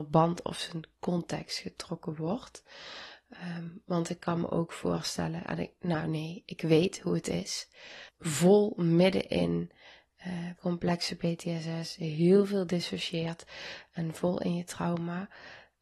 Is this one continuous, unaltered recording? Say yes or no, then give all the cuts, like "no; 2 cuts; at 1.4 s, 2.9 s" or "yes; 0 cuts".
no; 2 cuts; at 8.1 s, 10.6 s